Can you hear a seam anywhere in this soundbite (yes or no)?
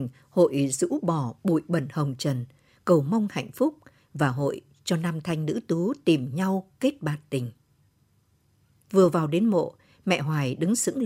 yes